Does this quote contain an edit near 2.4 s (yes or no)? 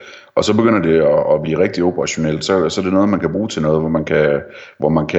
no